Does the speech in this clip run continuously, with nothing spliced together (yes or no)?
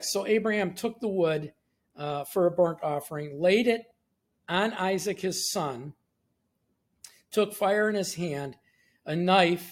yes